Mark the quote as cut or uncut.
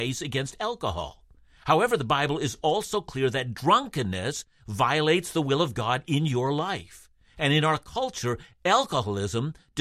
uncut